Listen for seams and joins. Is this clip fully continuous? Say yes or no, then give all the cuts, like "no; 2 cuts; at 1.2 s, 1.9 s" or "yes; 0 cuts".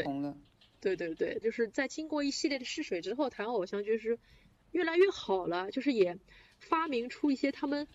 no; 1 cut; at 1.4 s